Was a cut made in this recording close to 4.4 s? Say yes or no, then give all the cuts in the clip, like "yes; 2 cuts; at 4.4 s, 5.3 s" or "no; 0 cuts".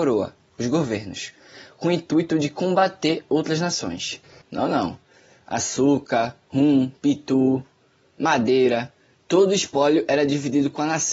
yes; 2 cuts; at 4.4 s, 6.4 s